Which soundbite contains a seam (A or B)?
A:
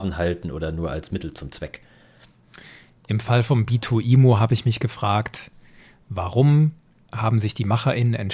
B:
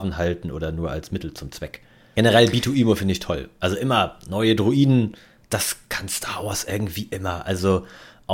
B